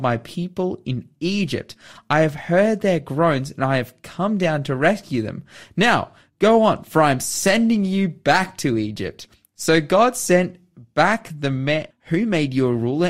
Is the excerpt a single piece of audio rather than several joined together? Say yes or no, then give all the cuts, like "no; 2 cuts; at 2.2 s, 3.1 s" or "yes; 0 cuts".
no; 1 cut; at 11.9 s